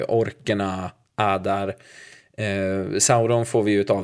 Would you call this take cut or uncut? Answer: uncut